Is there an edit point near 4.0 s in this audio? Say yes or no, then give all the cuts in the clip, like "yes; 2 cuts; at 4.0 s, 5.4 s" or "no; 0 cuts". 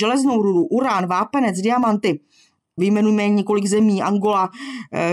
no; 1 cut; at 2.8 s